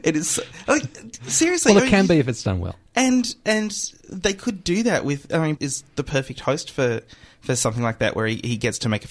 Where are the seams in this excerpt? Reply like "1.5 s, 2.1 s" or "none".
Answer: 5.6 s